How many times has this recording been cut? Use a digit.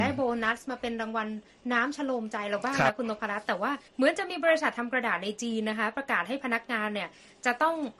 1